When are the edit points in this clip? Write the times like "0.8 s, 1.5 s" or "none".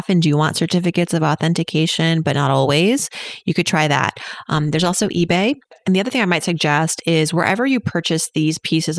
none